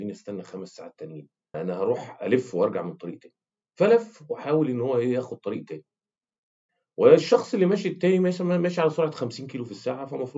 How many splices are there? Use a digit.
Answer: 1